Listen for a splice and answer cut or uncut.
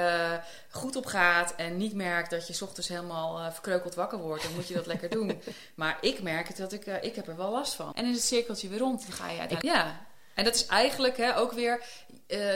cut